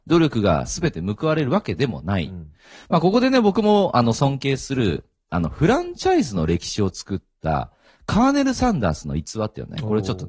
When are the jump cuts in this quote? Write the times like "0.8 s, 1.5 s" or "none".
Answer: none